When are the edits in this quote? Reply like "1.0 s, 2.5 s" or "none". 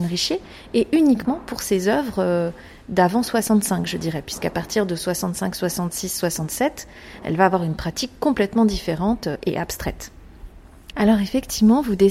10.9 s